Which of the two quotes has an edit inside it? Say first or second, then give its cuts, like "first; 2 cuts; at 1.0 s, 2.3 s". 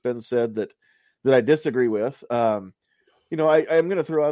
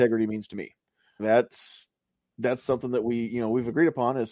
second; 1 cut; at 1.2 s